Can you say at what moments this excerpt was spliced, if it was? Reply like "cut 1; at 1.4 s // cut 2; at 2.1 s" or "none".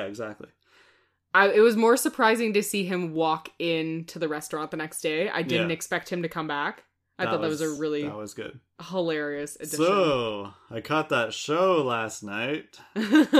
none